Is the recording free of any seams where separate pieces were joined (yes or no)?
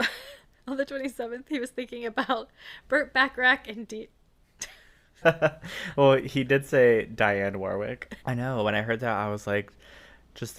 no